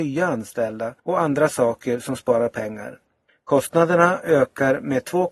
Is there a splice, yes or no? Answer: yes